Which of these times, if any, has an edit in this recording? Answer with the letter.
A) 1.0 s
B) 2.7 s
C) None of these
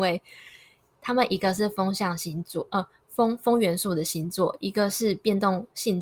C